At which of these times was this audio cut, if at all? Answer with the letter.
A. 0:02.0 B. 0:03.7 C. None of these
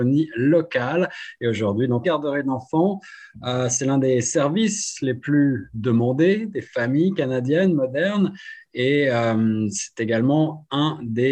A